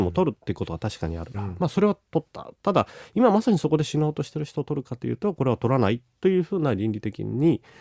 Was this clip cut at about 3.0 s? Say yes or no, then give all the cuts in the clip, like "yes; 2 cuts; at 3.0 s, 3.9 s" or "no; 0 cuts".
no; 1 cut; at 1.3 s